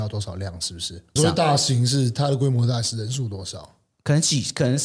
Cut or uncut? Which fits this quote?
cut